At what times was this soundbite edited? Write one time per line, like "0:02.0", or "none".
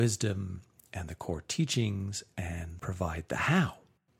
0:02.8